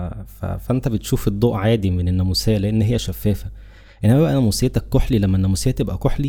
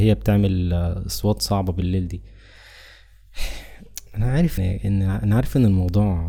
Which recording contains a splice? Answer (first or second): second